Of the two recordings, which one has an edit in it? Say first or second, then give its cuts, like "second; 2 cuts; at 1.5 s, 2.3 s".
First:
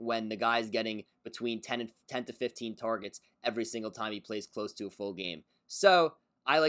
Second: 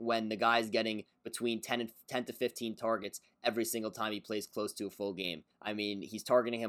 second; 1 cut; at 5.5 s